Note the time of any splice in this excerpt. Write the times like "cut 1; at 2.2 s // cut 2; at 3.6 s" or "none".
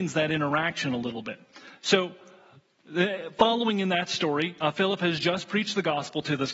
none